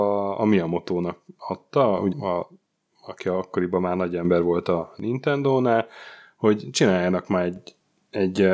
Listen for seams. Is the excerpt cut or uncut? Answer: cut